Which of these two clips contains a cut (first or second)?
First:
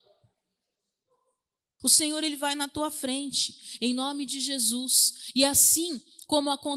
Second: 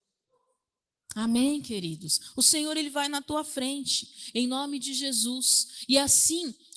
first